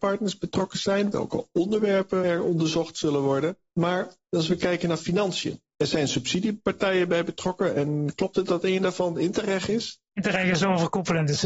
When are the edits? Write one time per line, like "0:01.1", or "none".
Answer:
none